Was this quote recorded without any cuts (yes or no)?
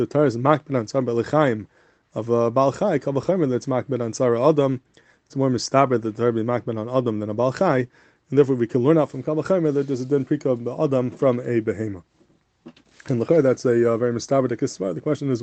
yes